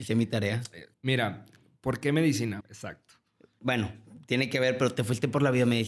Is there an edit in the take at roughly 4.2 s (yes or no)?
no